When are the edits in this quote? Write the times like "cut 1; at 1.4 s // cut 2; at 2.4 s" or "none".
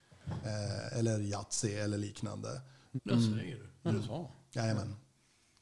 cut 1; at 3.0 s